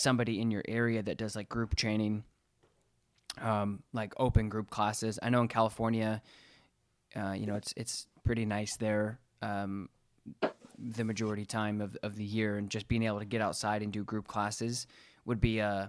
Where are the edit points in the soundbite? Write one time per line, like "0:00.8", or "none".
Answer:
none